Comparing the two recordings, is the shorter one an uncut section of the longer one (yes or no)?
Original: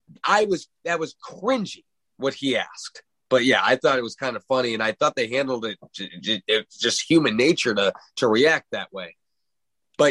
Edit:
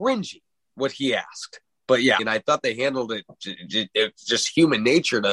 no